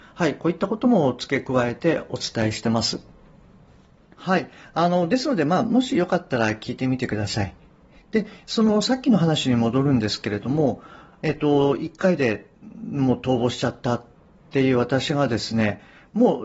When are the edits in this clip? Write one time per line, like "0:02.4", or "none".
none